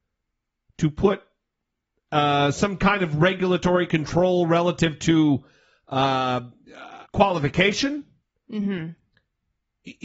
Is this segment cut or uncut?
cut